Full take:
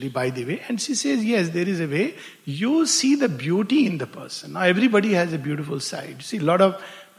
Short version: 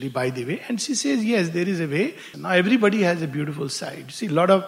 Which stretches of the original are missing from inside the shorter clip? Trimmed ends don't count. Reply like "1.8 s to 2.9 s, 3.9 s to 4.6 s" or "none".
2.3 s to 4.4 s